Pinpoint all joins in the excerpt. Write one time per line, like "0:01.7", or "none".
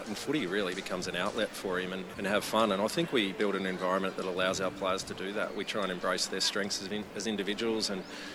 0:02.1